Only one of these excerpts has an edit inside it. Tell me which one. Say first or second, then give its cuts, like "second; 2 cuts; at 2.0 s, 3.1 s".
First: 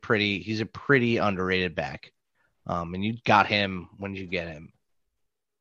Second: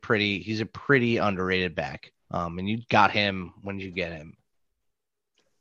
second; 1 cut; at 2.2 s